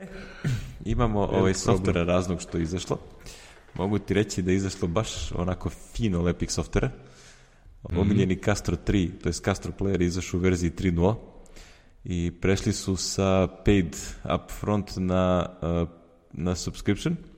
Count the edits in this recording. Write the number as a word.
one